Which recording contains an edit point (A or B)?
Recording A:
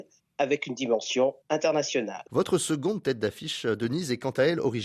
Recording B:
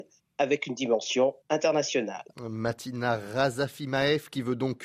A